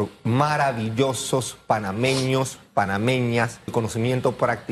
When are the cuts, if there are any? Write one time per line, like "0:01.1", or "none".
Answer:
0:03.7